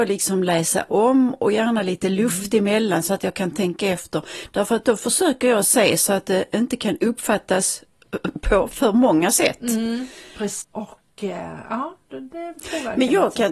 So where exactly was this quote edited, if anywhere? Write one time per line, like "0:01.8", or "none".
0:10.6